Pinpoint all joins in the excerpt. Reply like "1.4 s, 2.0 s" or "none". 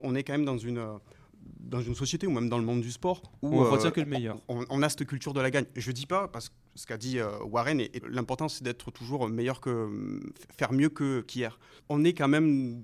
8.0 s, 11.8 s